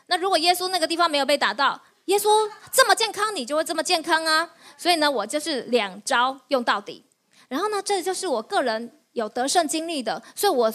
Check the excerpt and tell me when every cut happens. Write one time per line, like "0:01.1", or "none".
none

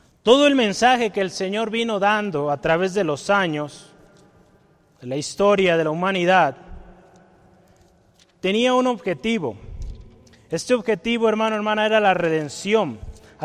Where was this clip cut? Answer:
none

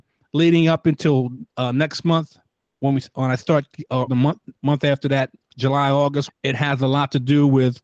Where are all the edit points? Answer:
0:04.1
0:06.3

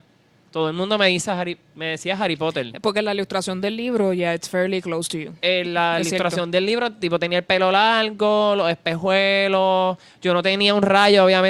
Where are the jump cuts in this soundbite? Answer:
none

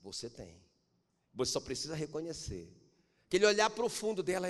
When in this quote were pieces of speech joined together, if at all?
none

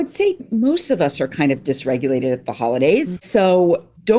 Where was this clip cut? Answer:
0:03.2

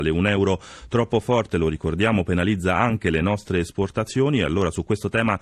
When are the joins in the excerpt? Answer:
none

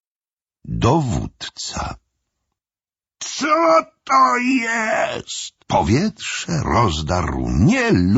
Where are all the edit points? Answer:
0:05.6

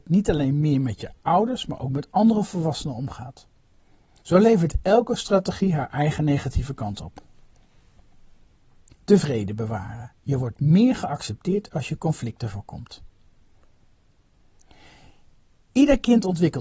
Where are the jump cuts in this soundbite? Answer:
0:04.2
0:08.9

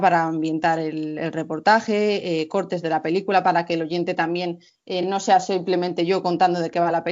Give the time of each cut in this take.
none

